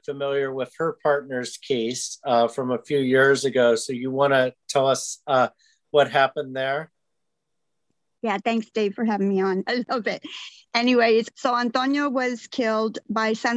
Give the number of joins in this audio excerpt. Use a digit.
2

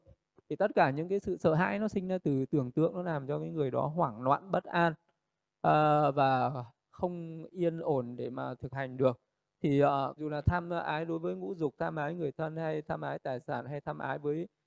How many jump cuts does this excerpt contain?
1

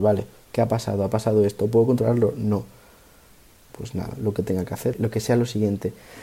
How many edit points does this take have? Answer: 2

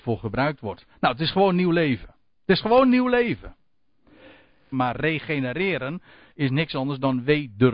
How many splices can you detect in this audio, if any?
1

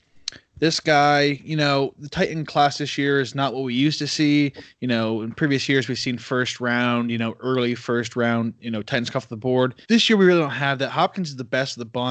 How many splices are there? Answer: 1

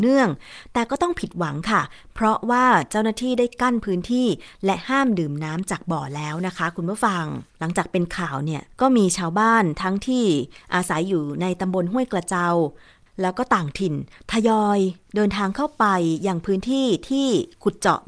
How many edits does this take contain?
2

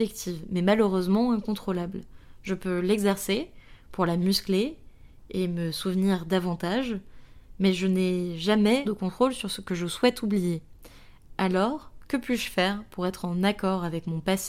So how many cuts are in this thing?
1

